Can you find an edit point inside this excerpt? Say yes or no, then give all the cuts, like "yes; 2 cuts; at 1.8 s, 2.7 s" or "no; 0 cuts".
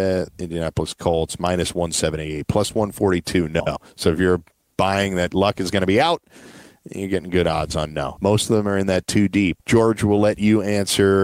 yes; 2 cuts; at 8.2 s, 9.6 s